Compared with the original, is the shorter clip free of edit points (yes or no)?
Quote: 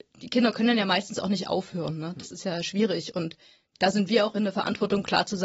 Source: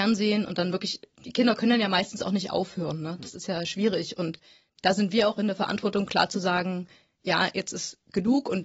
yes